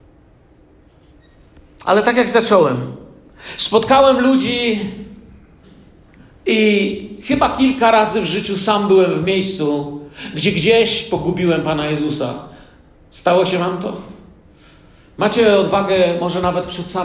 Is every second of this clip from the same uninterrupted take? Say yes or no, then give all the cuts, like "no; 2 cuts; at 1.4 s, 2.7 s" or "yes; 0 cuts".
yes; 0 cuts